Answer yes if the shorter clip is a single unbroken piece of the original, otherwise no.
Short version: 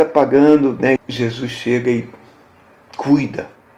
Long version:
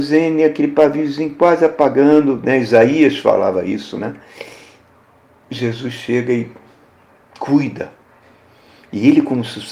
no